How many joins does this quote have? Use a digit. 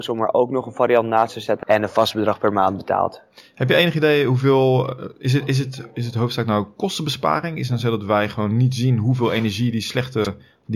1